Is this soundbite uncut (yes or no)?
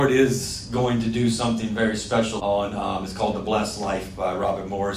no